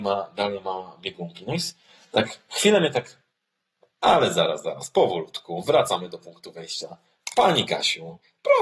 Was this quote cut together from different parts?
no; 0 cuts

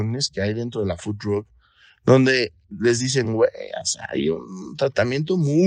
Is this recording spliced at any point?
no; 0 cuts

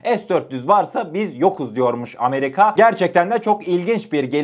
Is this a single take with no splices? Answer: yes; 0 cuts

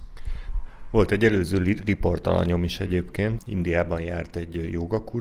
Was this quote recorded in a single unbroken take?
no; 1 cut; at 3.4 s

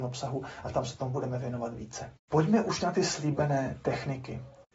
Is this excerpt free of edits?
yes; 0 cuts

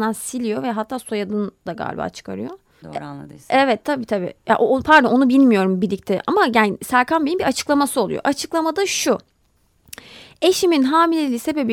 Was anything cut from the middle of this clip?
yes; 1 cut; at 2.8 s

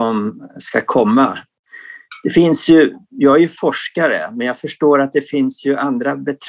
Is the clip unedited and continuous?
yes; 0 cuts

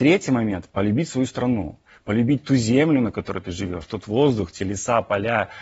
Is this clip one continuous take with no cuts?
yes; 0 cuts

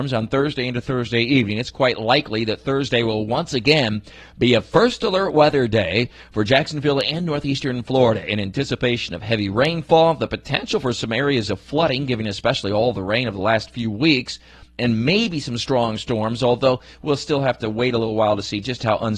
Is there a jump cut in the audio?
no; 0 cuts

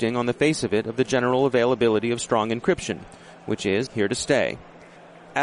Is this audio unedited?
no; 1 cut; at 3.9 s

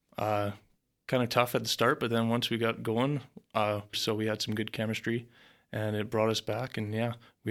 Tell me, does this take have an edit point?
yes; 1 cut; at 3.9 s

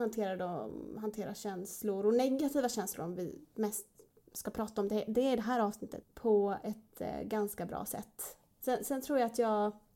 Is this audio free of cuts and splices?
no; 2 cuts; at 6.0 s, 8.6 s

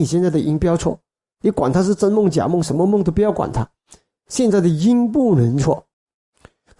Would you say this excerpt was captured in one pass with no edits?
yes; 0 cuts

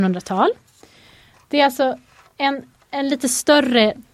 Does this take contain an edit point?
no; 0 cuts

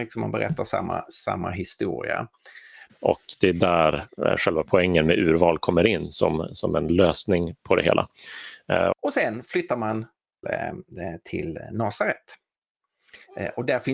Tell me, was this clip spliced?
yes; 3 cuts; at 2.9 s, 8.9 s, 10.4 s

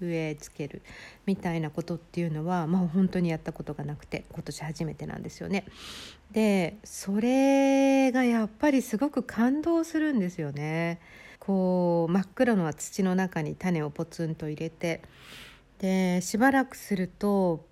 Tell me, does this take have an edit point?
yes; 1 cut; at 11.3 s

